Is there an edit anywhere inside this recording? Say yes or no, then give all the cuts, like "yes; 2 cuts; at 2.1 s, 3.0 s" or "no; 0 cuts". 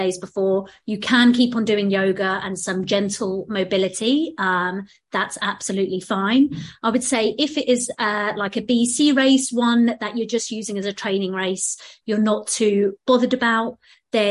no; 0 cuts